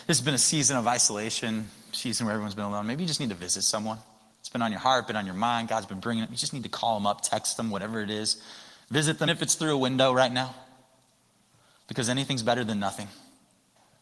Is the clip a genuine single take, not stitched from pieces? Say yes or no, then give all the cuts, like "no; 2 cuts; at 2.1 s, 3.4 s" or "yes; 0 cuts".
no; 1 cut; at 9.3 s